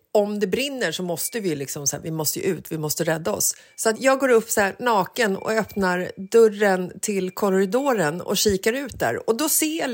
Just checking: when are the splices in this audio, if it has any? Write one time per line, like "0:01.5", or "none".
0:03.9